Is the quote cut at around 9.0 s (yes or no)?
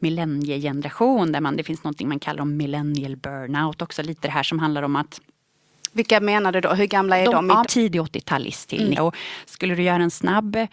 yes